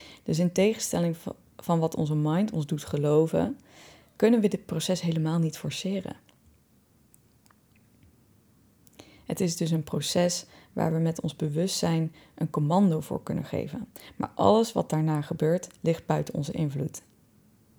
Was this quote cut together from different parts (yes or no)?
no